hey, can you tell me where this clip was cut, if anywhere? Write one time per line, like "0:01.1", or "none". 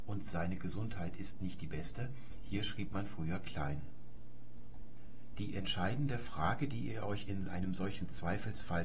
none